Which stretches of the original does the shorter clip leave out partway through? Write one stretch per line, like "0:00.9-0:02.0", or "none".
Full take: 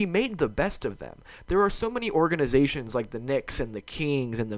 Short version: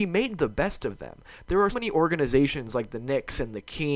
0:01.7-0:01.9